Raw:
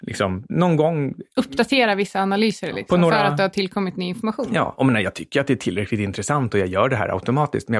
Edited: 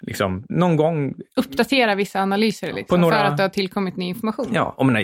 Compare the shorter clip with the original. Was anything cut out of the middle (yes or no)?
no